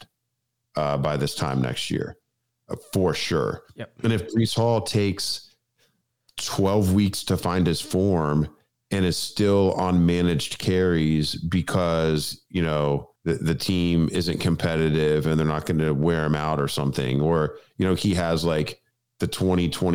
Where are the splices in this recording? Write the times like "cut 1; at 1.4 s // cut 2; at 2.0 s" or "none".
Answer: cut 1; at 13.2 s